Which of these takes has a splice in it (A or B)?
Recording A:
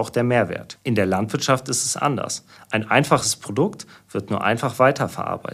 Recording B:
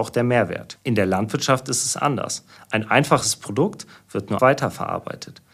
B